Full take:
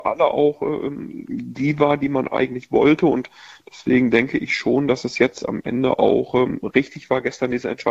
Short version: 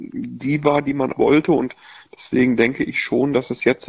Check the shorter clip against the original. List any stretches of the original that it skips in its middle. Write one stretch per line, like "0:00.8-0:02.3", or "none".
0:02.3-0:02.7